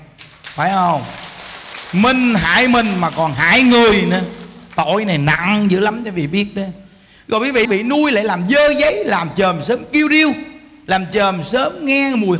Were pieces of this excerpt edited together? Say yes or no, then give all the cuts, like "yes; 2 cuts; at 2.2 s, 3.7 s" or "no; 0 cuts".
yes; 1 cut; at 7.6 s